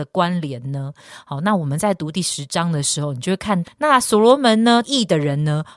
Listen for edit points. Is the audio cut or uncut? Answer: cut